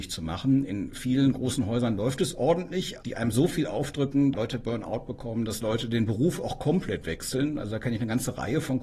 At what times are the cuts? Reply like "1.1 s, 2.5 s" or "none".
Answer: 3.0 s, 4.3 s